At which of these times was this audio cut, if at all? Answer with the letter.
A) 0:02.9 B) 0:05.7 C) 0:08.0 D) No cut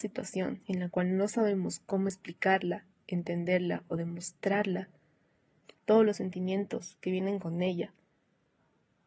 D